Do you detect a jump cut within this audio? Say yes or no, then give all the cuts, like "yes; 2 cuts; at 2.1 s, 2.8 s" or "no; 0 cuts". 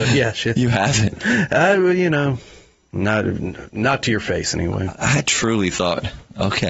no; 0 cuts